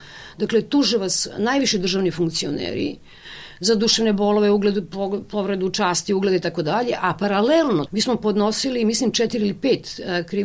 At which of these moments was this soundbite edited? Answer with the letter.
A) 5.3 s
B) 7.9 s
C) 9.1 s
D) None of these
B